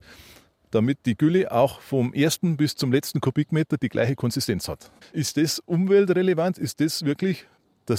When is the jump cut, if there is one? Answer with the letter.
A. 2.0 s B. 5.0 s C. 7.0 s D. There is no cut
B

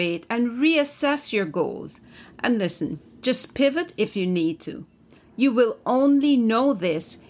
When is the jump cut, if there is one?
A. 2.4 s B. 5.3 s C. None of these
C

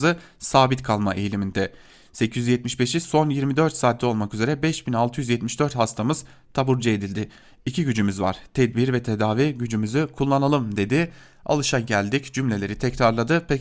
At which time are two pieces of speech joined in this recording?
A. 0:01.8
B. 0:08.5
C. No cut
C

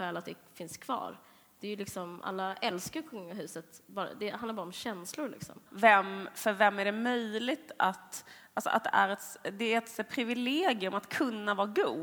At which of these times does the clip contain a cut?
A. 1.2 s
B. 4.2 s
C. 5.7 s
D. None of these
C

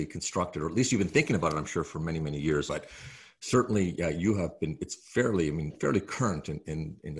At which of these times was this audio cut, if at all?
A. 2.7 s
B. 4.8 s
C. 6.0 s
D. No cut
A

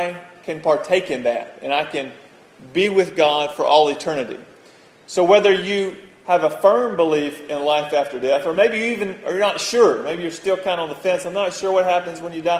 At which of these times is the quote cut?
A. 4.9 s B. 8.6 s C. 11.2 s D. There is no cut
D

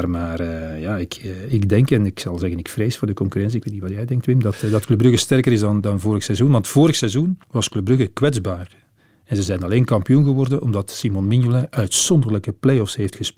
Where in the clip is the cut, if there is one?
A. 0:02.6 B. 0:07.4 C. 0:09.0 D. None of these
B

